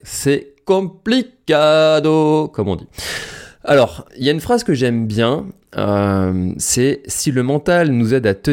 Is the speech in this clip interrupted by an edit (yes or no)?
yes